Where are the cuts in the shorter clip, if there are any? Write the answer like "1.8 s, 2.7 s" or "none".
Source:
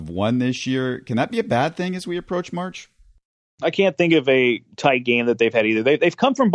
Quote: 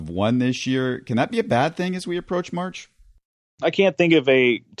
none